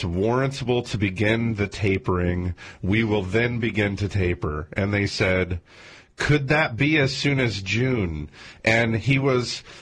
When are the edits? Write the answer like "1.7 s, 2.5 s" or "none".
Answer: none